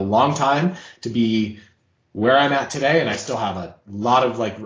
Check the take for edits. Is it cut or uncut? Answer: uncut